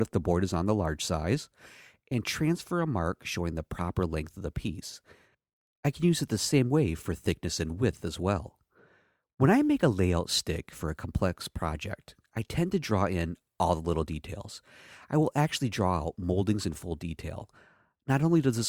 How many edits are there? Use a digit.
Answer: 0